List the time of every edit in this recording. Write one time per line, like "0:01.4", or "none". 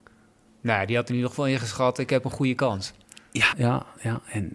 0:03.5